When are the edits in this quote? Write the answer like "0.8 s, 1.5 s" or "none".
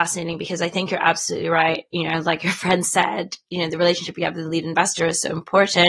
none